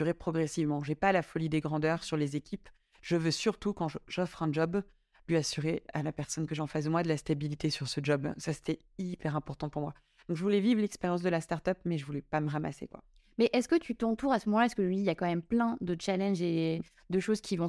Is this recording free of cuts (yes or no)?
yes